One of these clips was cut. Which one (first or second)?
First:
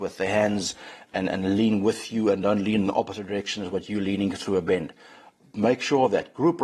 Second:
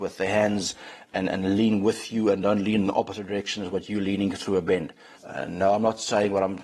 second